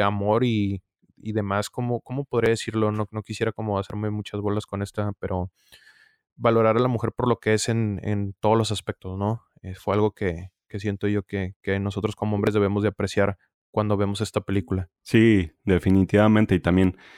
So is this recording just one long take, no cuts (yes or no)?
yes